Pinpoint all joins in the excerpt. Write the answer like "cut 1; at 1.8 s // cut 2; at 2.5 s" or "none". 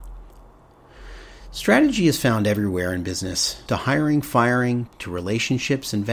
cut 1; at 3.7 s // cut 2; at 4.9 s